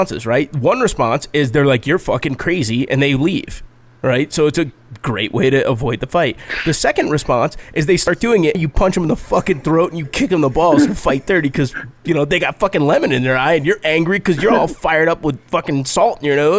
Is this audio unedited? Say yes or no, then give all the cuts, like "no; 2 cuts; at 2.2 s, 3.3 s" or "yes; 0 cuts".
no; 1 cut; at 8.5 s